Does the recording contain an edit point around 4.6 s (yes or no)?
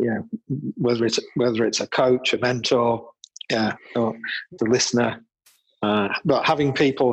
yes